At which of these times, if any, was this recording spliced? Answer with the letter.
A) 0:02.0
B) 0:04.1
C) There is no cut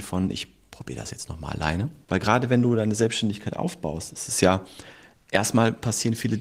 A